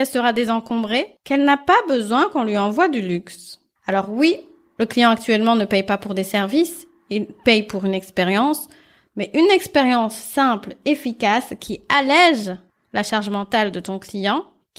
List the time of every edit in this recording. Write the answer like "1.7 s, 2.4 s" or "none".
none